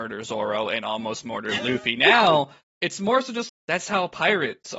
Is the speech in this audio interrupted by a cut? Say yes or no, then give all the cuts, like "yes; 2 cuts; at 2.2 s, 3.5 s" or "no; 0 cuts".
yes; 1 cut; at 3.5 s